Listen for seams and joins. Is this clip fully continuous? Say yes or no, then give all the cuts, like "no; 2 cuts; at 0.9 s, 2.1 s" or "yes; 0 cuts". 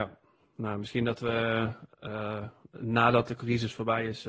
yes; 0 cuts